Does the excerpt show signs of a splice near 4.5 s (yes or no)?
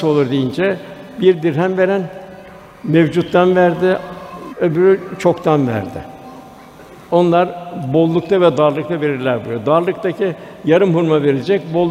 yes